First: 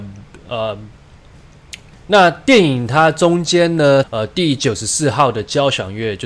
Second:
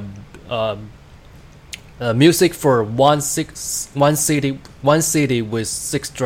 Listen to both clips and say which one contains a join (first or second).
first